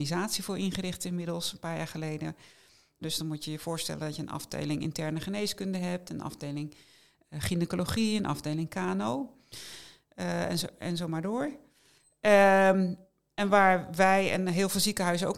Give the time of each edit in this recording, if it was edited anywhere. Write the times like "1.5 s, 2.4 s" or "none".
3.0 s